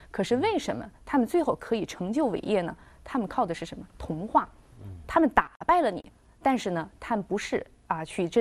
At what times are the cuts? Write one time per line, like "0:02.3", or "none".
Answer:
none

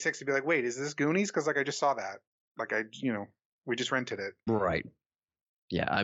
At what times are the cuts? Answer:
0:04.5

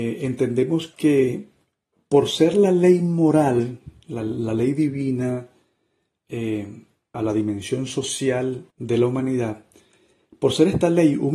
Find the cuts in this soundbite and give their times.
0:07.1
0:08.7

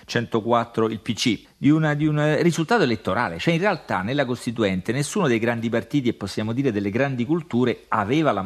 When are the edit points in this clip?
0:01.4

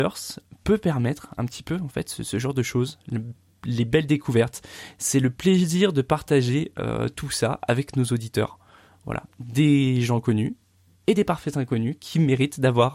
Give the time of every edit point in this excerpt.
none

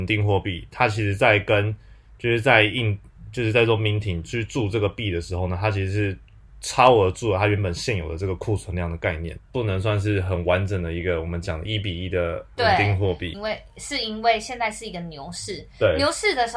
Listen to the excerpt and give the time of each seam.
0:09.4
0:13.3

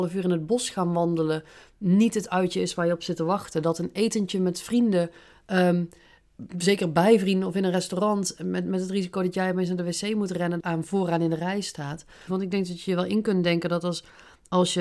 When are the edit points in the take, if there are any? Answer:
0:10.6
0:12.3

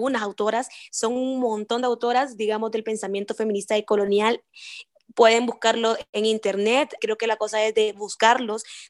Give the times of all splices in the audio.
0:07.0

